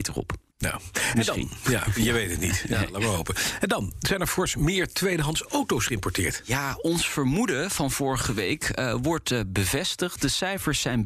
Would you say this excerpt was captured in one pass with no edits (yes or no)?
yes